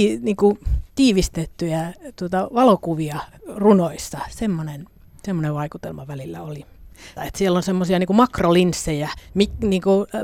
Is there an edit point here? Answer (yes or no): yes